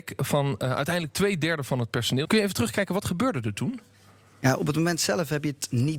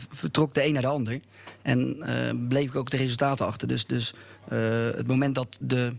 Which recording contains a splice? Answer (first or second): first